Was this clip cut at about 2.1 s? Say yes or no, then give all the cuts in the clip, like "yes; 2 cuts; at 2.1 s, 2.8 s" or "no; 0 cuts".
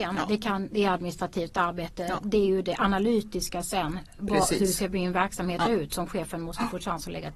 no; 0 cuts